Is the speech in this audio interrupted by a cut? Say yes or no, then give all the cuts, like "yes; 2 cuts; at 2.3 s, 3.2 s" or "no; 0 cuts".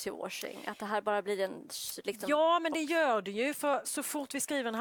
yes; 1 cut; at 3.8 s